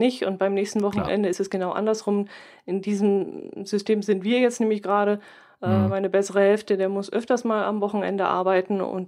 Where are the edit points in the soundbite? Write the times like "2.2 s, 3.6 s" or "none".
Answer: none